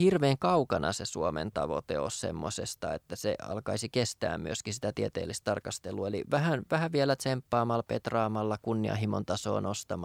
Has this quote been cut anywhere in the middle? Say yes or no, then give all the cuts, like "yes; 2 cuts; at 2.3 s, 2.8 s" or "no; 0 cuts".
no; 0 cuts